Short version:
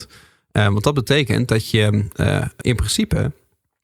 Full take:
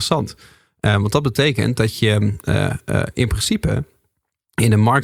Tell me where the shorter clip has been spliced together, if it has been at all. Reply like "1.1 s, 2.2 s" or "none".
2.6 s